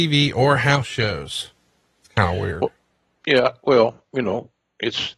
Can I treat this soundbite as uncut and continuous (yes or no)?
yes